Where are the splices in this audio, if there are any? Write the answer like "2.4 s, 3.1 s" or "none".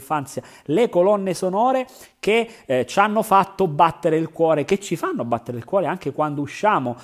none

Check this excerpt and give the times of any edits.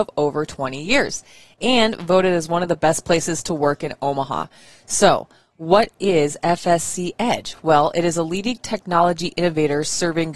none

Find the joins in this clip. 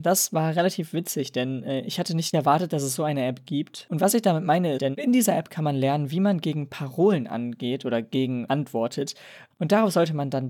4.8 s, 9.5 s

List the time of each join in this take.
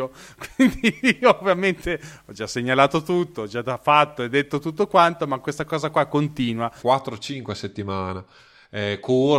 6.8 s

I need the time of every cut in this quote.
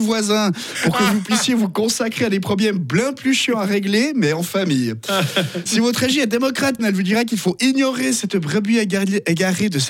5.7 s, 6.8 s

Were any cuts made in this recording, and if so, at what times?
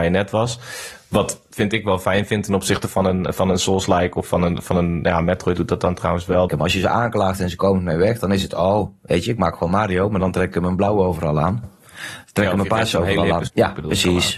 6.5 s, 11.6 s, 13.5 s

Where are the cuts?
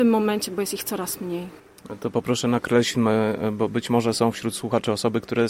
none

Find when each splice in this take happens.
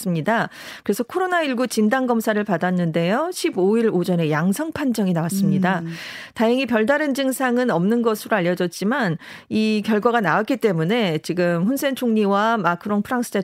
none

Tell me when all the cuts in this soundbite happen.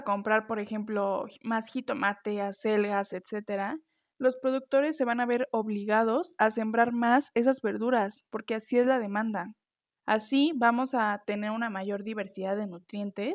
3.1 s, 10.0 s

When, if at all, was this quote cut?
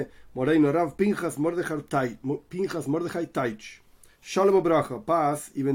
none

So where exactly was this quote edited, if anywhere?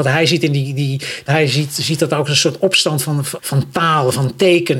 1.3 s, 3.4 s

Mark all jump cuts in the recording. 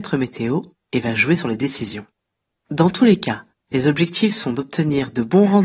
none

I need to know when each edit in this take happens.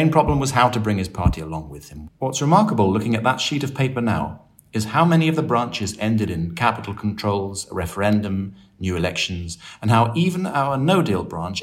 2.1 s

